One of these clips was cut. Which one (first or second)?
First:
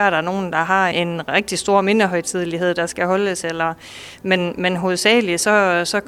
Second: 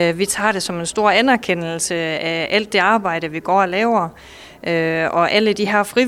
first